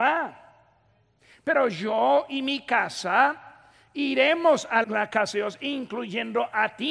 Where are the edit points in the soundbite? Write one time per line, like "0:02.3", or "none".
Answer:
0:04.8